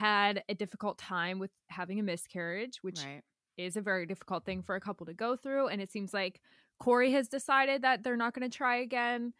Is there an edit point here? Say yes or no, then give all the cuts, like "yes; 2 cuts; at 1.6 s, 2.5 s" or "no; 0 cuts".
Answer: no; 0 cuts